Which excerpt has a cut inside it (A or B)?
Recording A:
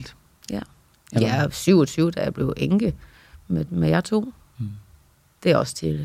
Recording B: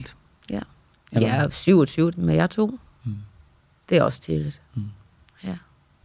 B